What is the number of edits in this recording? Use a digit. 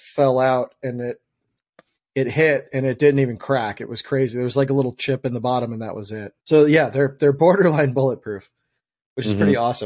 1